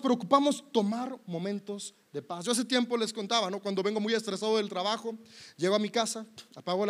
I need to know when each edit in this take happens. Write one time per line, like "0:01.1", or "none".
none